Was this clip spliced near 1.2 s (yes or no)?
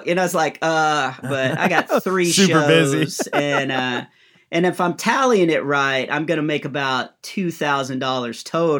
yes